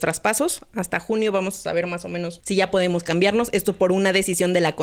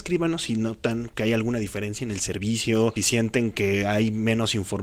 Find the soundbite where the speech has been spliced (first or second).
second